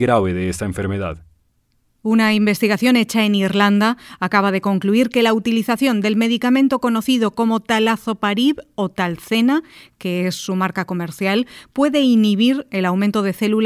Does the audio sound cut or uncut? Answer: uncut